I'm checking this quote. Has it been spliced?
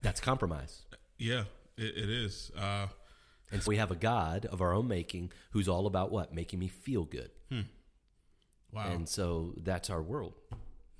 yes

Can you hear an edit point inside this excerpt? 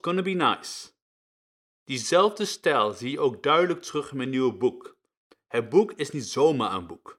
no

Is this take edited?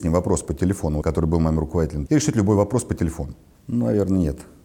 yes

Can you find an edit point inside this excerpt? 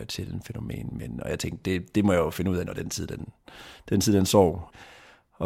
no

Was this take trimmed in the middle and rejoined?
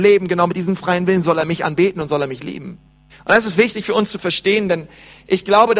yes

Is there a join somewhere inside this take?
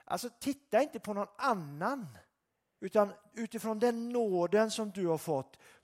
yes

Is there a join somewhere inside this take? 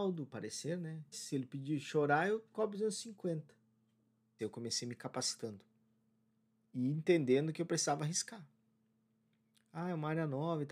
yes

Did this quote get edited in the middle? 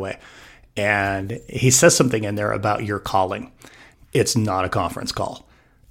yes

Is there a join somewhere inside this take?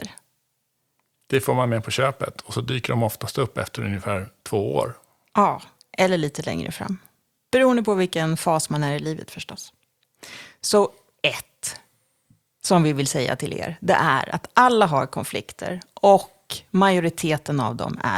no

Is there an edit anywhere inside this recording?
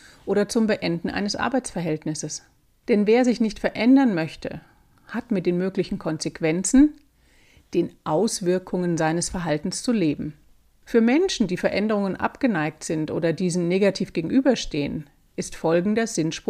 no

